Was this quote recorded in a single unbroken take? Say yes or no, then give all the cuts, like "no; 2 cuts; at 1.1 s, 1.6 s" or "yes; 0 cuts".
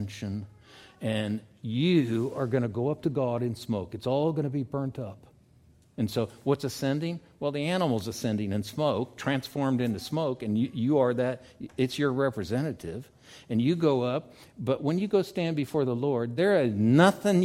yes; 0 cuts